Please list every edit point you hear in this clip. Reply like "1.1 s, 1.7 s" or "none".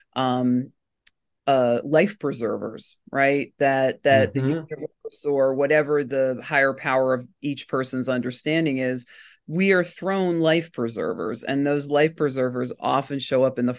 none